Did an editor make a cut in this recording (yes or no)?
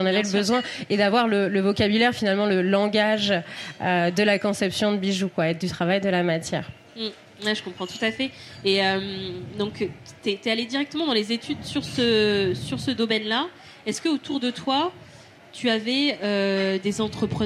no